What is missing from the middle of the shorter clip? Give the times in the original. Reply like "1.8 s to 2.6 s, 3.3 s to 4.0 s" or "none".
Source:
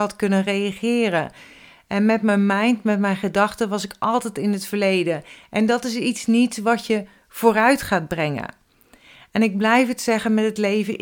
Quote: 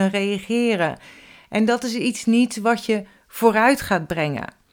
1.8 s to 5.5 s